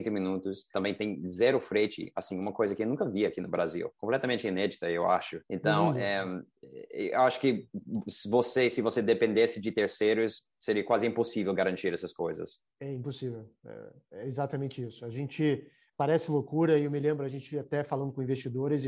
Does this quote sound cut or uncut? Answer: cut